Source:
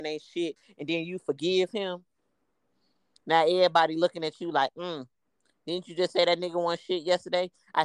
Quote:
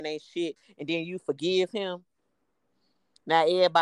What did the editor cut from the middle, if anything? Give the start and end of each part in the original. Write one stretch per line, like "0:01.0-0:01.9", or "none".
none